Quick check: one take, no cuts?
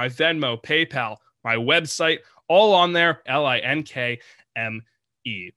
no; 1 cut; at 3.3 s

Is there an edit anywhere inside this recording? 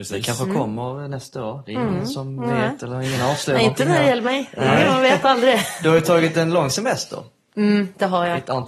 no; 0 cuts

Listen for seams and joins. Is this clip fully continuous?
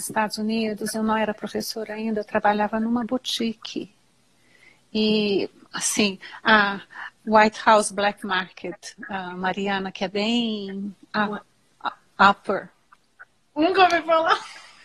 yes; 0 cuts

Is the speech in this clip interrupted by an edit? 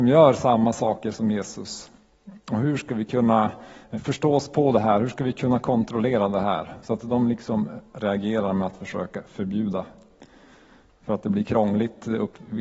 no; 0 cuts

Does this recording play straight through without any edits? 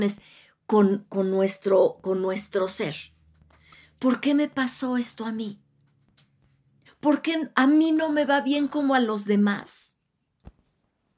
no; 1 cut; at 6.9 s

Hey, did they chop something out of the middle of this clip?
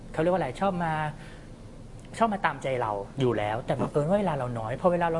yes; 1 cut; at 3.2 s

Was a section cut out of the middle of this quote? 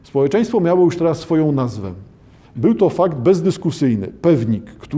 yes; 1 cut; at 2.4 s

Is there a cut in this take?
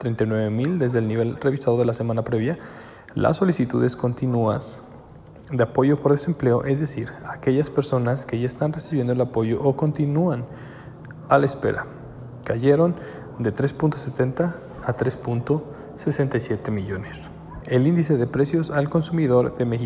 yes; 1 cut; at 17.6 s

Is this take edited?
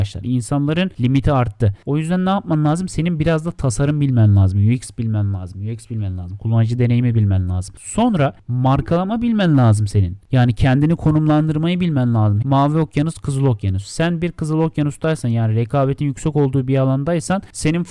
yes; 1 cut; at 12.4 s

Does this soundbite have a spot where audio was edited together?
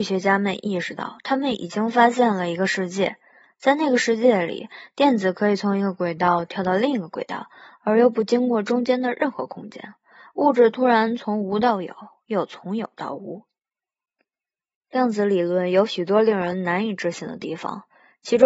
no; 0 cuts

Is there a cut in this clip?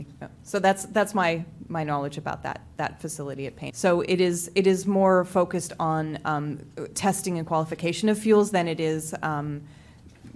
yes; 1 cut; at 3.7 s

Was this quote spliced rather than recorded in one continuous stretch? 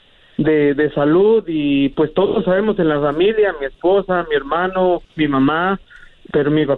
no; 0 cuts

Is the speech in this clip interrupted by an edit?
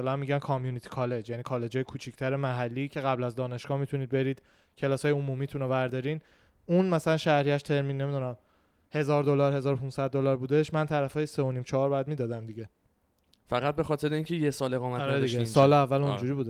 no; 0 cuts

